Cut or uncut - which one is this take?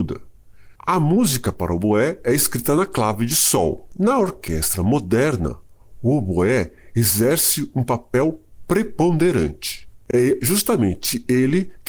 uncut